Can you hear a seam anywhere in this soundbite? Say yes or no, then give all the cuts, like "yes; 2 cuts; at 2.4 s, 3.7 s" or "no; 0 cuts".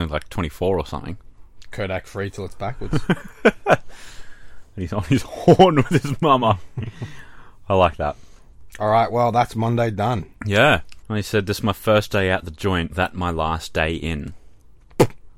yes; 2 cuts; at 11.0 s, 12.9 s